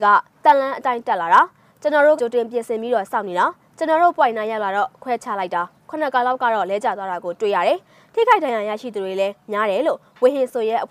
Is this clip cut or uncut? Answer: cut